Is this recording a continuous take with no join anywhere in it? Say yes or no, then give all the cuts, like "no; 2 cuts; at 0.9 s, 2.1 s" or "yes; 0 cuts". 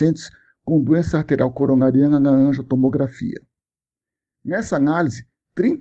yes; 0 cuts